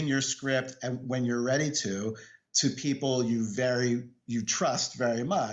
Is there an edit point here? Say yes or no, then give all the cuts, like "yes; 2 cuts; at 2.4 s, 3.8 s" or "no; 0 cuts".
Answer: no; 0 cuts